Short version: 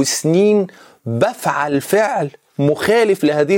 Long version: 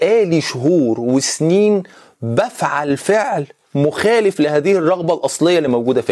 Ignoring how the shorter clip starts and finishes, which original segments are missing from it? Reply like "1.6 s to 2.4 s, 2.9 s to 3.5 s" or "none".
none